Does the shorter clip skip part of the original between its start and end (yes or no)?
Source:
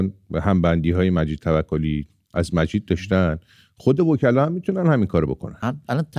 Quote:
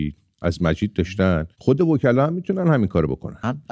yes